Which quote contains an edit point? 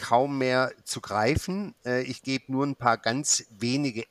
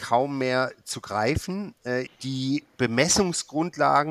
second; 1 cut; at 2.1 s

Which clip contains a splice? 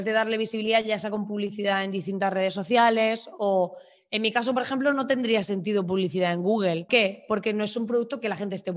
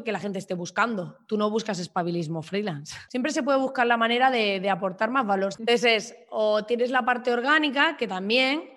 second; 2 cuts; at 3.1 s, 5.5 s

